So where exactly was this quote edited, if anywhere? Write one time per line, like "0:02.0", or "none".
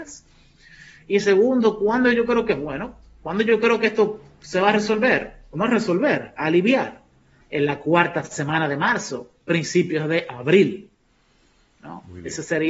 0:07.4